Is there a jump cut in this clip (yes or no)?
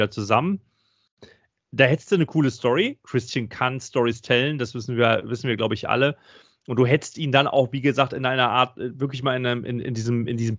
no